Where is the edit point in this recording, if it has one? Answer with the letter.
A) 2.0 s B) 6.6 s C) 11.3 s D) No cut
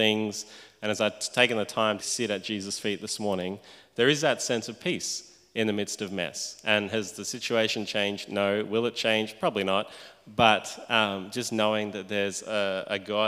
A